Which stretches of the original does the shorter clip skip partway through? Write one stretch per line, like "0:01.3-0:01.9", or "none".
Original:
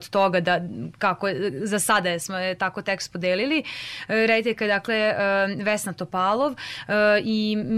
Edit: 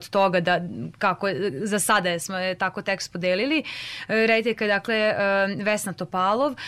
none